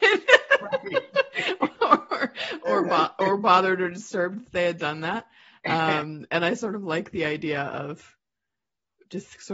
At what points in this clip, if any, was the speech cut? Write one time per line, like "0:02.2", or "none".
none